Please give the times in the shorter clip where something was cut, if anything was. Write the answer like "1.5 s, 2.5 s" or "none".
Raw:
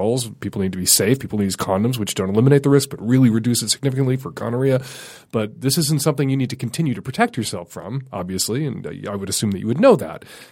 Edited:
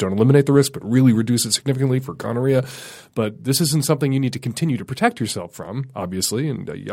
none